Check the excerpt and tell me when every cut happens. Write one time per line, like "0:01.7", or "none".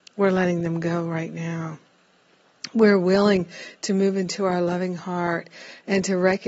none